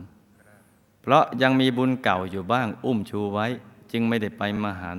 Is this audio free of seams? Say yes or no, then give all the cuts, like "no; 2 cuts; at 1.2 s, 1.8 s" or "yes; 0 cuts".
yes; 0 cuts